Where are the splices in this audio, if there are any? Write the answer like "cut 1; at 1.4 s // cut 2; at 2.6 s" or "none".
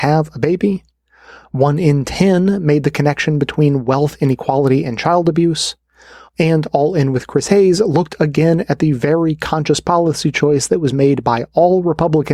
none